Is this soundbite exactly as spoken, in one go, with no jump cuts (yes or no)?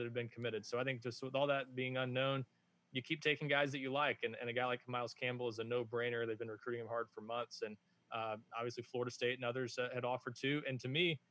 yes